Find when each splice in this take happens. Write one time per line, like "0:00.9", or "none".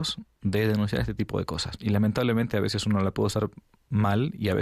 0:01.8